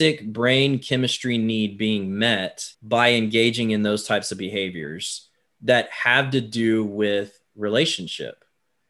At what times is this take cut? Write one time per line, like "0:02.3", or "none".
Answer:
0:02.7

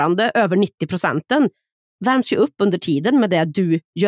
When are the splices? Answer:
none

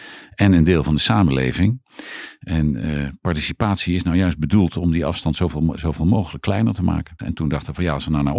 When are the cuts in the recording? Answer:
0:07.2

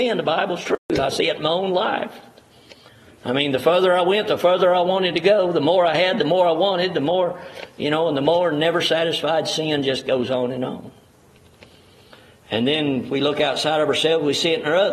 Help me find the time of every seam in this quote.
none

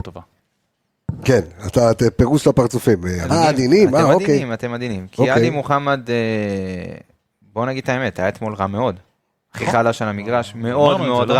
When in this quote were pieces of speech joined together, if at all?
0:03.3

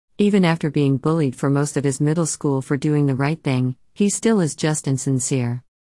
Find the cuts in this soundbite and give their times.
none

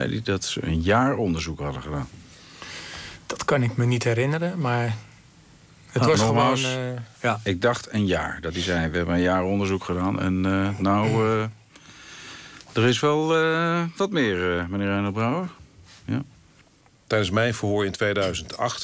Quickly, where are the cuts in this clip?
none

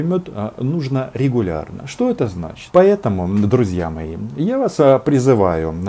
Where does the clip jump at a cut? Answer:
0:02.7

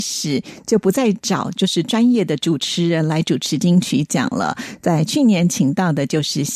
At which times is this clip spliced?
none

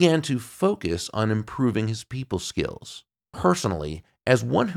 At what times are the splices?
0:03.3

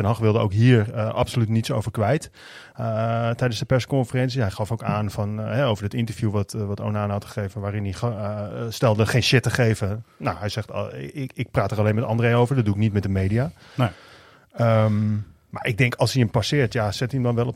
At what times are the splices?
none

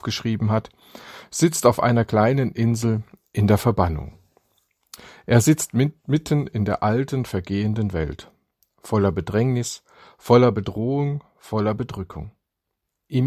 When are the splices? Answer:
none

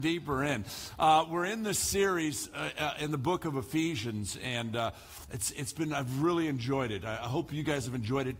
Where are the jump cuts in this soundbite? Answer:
none

